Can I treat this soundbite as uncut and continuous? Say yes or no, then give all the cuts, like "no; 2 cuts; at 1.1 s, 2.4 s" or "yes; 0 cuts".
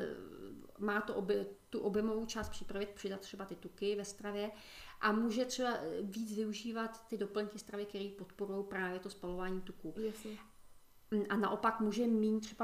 no; 1 cut; at 2.9 s